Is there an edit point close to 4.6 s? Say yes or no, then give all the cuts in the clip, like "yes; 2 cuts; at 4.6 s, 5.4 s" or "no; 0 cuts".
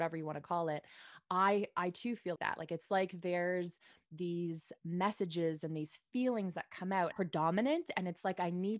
no; 2 cuts; at 2.4 s, 7.1 s